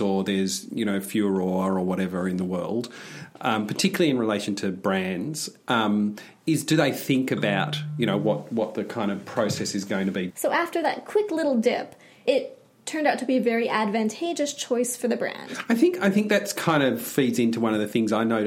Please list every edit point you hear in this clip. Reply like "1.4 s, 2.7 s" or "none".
10.3 s, 12.3 s